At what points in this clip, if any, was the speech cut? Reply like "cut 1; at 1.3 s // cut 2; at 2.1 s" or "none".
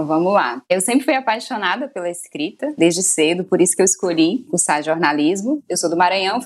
cut 1; at 2.8 s // cut 2; at 4.5 s